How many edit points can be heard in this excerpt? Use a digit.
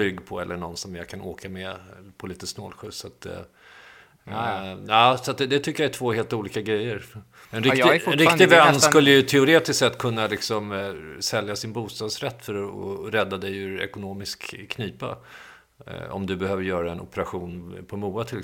1